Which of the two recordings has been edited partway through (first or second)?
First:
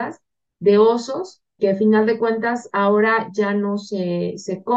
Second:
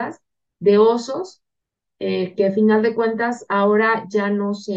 first